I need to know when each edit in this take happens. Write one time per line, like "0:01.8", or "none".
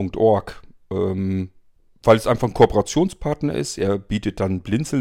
none